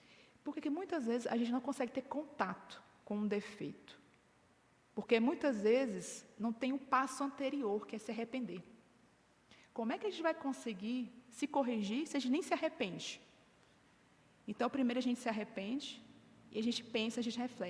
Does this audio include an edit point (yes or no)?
no